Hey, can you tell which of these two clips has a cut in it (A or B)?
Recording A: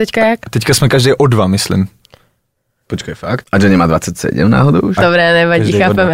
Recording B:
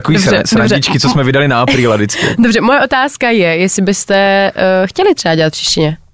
A